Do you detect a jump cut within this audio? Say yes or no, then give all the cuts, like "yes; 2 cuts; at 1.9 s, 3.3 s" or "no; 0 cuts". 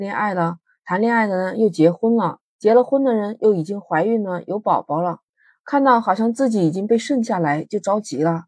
no; 0 cuts